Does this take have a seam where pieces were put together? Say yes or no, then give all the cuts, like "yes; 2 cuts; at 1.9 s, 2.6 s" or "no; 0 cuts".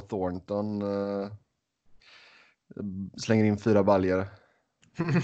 no; 0 cuts